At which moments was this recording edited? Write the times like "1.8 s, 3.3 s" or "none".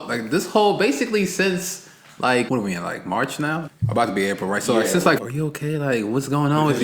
2.5 s, 3.7 s, 5.2 s